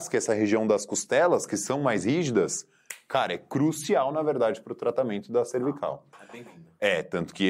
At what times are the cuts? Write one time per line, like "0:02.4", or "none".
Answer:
none